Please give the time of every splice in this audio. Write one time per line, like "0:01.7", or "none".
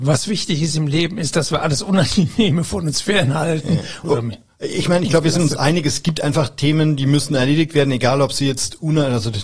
0:04.0